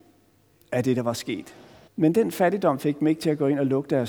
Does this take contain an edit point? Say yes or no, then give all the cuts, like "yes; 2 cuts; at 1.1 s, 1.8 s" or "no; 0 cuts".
yes; 1 cut; at 1.9 s